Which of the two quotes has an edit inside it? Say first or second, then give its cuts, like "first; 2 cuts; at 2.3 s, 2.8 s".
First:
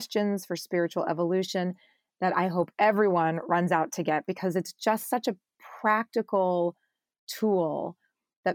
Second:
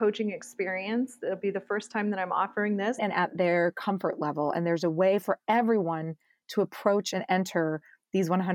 second; 1 cut; at 3.0 s